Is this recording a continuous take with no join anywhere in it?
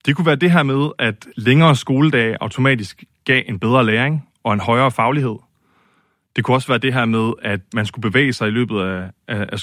yes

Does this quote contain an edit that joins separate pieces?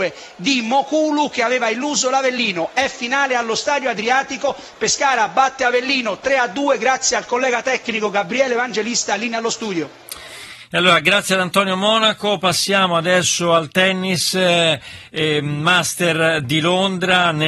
no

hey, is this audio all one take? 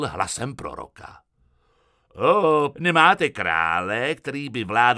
no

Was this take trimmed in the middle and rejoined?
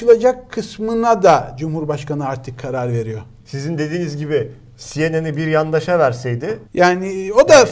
yes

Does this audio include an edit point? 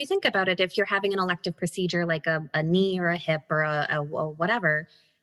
no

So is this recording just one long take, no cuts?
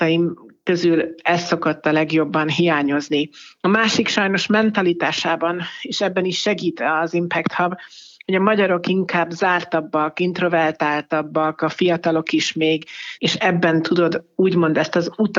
no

